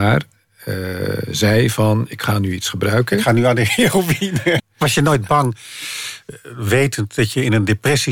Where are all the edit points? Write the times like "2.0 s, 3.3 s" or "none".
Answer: 4.6 s